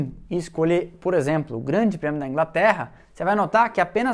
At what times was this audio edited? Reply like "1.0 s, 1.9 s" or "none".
none